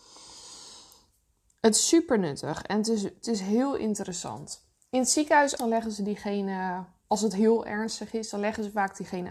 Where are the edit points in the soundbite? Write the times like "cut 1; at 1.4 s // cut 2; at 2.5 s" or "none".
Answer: cut 1; at 5.6 s